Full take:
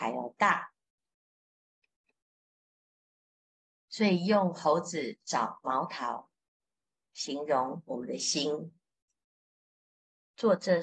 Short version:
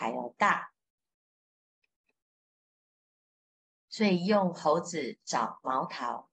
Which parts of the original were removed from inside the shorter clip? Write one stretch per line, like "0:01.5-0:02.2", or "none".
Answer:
none

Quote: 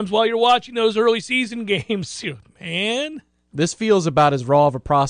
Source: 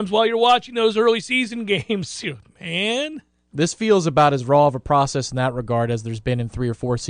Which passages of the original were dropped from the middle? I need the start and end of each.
none

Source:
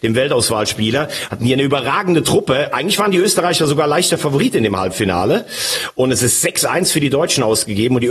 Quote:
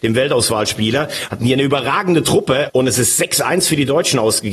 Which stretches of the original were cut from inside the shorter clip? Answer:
0:02.7-0:05.9

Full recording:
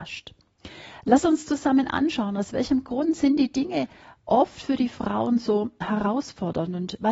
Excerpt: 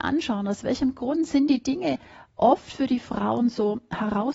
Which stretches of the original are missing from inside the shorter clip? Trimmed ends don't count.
none

